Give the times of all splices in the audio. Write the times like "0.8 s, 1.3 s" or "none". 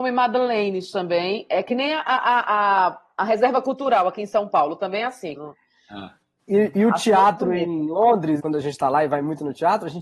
5.4 s, 8.4 s